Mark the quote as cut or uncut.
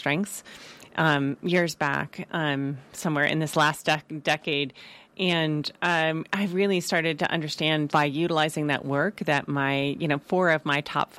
cut